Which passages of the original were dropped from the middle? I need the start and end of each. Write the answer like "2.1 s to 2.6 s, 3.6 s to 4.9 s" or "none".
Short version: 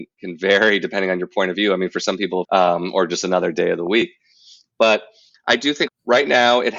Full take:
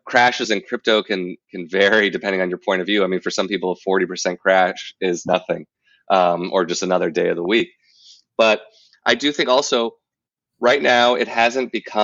3.7 s to 6.0 s, 9.5 s to 10.4 s